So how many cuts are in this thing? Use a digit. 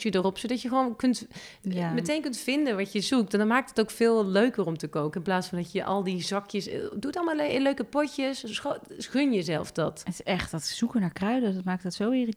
0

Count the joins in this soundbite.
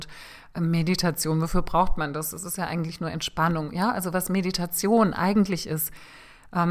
0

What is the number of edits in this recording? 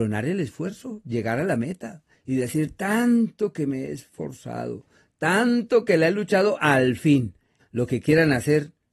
1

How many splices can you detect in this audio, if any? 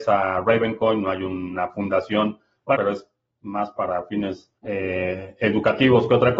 2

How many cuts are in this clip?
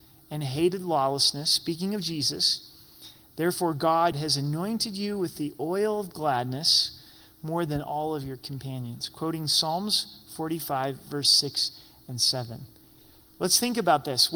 1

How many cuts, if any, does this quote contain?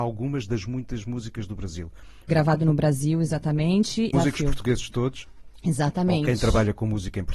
2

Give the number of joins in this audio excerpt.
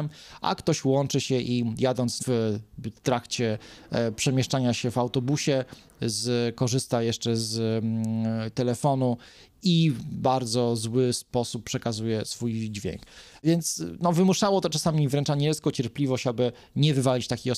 1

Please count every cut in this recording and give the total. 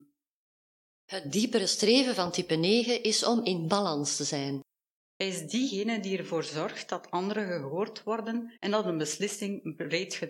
2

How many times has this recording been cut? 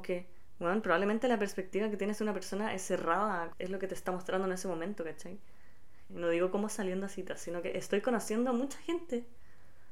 2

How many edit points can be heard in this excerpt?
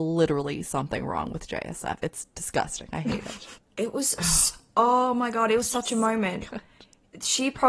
1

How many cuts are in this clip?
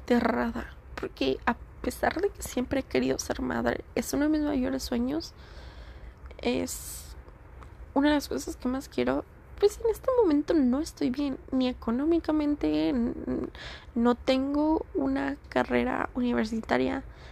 0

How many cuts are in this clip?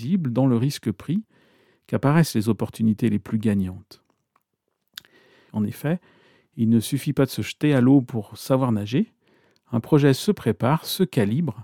1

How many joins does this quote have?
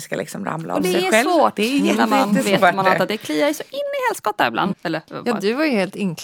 1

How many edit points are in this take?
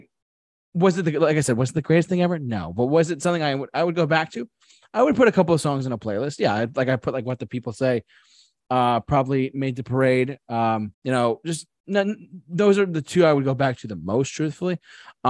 1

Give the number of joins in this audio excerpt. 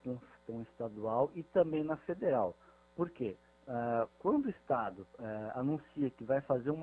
0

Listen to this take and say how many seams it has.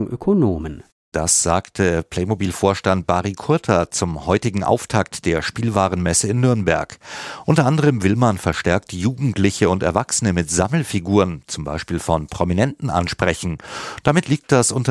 1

